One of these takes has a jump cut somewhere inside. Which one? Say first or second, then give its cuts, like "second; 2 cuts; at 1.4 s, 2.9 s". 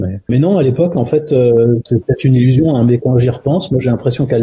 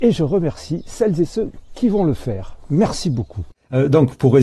first; 1 cut; at 3.0 s